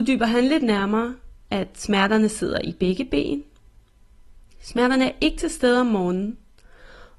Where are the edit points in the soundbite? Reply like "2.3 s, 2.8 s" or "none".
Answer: 4.5 s